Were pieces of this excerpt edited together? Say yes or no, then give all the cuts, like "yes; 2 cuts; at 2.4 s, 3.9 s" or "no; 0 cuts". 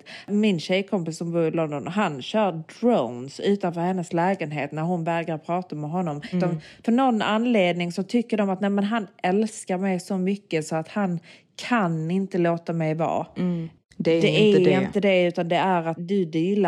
yes; 2 cuts; at 6.3 s, 13.8 s